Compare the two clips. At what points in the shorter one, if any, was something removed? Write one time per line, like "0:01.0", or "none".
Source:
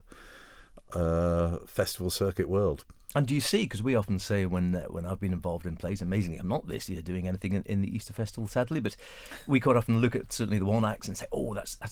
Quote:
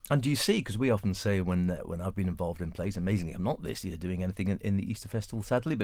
none